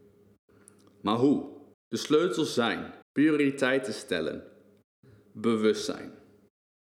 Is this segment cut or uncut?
cut